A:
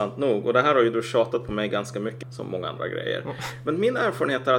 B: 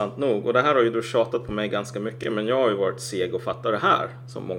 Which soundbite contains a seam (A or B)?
A